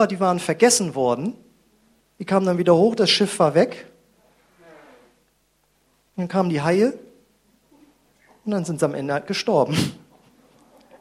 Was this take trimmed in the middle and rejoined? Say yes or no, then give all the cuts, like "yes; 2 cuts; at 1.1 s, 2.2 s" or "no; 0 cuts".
no; 0 cuts